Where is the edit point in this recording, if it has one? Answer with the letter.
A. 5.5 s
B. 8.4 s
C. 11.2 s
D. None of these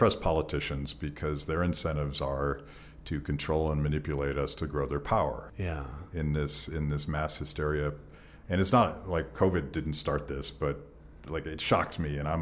A